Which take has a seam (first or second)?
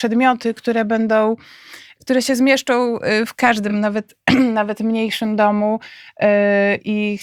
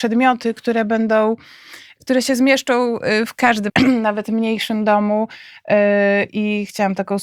second